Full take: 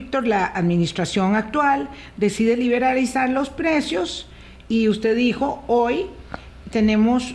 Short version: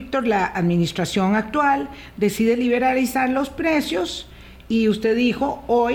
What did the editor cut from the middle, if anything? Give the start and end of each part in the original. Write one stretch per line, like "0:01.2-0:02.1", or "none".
none